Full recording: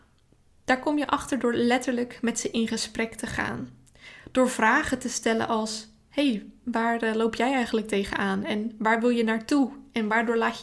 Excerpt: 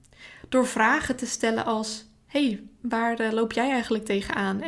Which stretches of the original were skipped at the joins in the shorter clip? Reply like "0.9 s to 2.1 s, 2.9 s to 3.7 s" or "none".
none